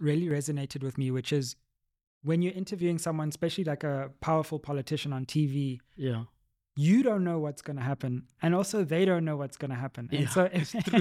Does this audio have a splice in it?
no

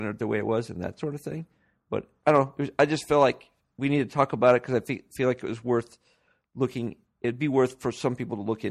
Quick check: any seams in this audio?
no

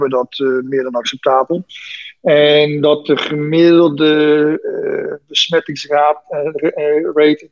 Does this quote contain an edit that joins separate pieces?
no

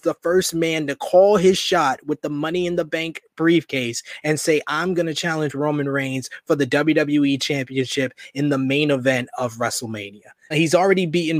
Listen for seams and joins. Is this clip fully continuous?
no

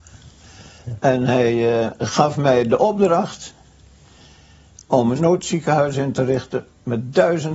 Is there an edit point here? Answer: no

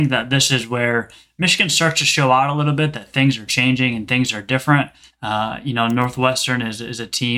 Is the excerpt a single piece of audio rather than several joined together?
no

